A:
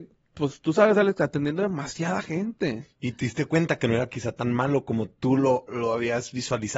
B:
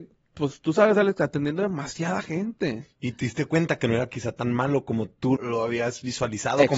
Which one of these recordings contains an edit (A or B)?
B